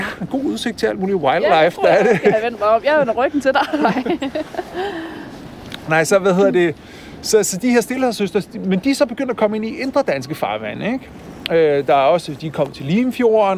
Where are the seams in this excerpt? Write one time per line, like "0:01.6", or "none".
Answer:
none